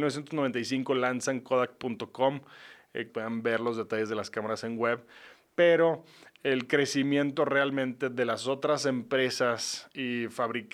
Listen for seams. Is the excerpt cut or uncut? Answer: cut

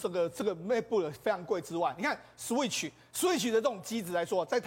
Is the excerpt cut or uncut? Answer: uncut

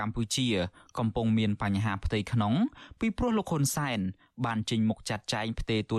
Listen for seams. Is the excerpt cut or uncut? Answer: uncut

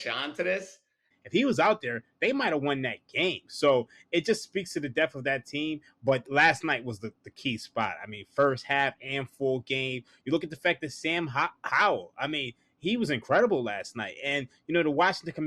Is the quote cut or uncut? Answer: cut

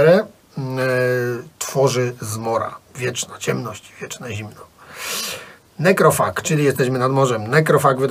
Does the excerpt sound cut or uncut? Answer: cut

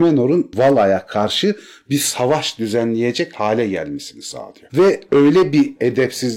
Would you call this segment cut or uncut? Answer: cut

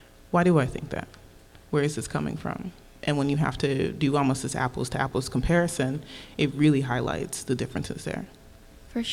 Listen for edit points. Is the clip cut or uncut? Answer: uncut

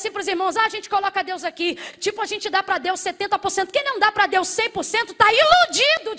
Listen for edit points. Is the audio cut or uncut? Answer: uncut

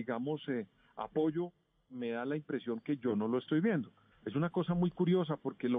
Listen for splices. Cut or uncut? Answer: cut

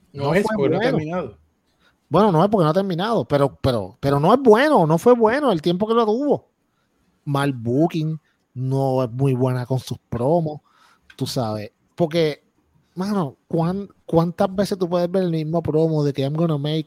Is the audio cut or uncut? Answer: cut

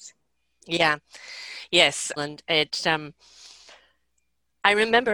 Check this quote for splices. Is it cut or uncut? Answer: cut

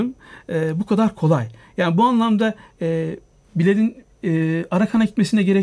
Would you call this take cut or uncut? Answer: uncut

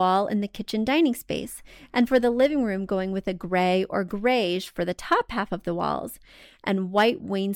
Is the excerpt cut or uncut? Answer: uncut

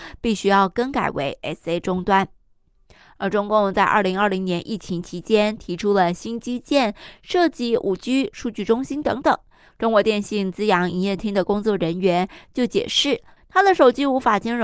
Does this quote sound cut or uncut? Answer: cut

